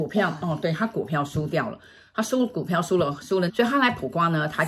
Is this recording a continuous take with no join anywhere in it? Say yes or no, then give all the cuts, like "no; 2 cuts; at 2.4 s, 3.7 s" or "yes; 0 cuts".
no; 1 cut; at 3.5 s